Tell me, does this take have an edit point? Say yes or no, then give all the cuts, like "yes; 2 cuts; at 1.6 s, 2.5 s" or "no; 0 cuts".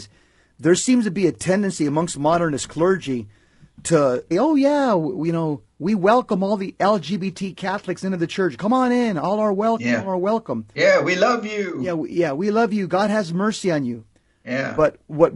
yes; 1 cut; at 4.3 s